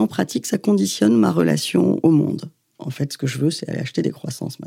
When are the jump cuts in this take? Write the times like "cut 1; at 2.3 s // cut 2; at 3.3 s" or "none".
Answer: cut 1; at 2.7 s